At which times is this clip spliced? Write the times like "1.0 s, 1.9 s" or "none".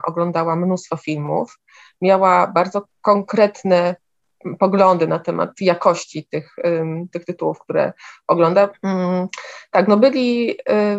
8.7 s